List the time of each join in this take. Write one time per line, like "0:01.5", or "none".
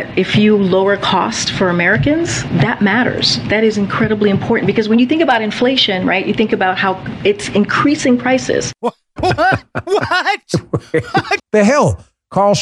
0:09.2
0:11.4